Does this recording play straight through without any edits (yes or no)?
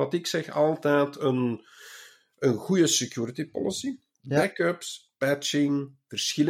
yes